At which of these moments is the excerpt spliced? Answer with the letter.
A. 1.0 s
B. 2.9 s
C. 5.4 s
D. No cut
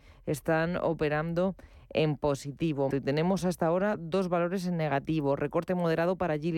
B